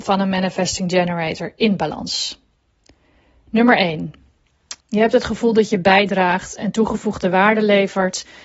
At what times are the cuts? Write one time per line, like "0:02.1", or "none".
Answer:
0:04.8